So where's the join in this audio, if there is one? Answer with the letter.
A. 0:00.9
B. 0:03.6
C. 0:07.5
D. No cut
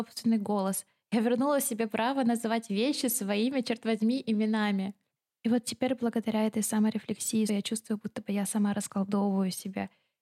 C